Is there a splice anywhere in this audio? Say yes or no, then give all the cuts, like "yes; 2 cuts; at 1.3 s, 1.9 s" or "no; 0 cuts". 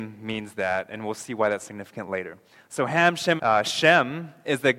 yes; 1 cut; at 3.4 s